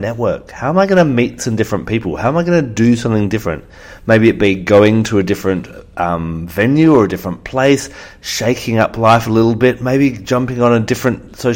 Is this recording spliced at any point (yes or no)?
no